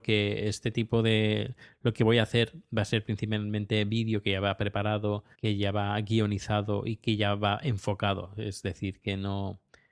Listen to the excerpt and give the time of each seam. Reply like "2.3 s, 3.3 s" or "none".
5.3 s